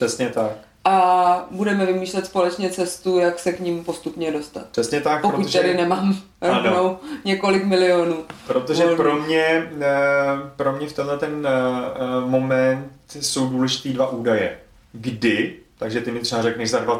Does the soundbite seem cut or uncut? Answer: uncut